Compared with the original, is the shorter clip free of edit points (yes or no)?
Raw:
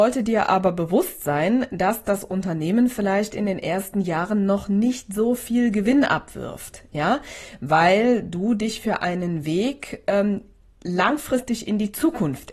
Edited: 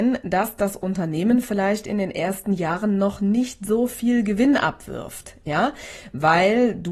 yes